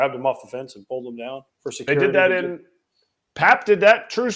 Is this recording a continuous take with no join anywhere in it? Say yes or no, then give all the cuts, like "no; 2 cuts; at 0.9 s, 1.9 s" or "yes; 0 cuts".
no; 1 cut; at 1.5 s